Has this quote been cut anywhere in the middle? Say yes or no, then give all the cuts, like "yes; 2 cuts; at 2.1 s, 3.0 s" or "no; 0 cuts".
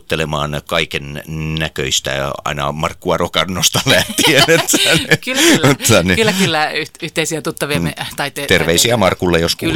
no; 0 cuts